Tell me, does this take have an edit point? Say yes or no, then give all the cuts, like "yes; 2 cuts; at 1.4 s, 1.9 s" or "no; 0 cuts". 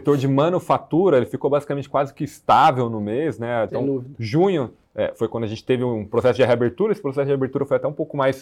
yes; 1 cut; at 3.7 s